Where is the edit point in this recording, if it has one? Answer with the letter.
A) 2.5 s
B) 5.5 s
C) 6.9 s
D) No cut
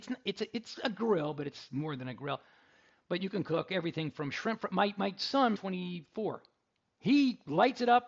B